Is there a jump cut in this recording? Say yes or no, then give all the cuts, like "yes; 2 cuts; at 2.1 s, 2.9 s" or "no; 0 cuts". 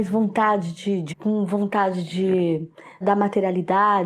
yes; 2 cuts; at 1.1 s, 3.0 s